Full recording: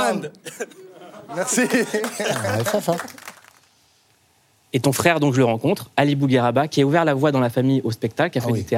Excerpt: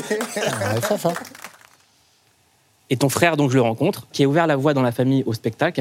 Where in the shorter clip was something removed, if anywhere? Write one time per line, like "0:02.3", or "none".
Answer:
0:04.1